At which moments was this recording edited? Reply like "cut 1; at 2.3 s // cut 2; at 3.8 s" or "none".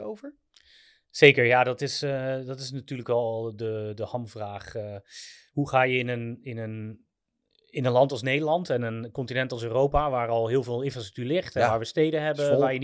none